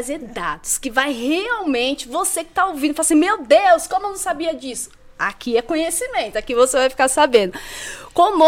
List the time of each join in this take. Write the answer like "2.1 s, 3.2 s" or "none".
none